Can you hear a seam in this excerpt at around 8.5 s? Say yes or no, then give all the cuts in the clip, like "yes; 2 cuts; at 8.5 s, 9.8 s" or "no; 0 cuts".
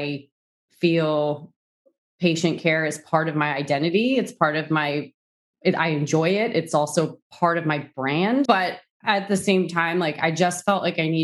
yes; 2 cuts; at 2.0 s, 8.5 s